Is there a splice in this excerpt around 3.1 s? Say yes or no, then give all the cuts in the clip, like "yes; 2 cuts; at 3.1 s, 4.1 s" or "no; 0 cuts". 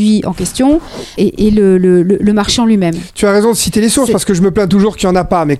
no; 1 cut; at 1.2 s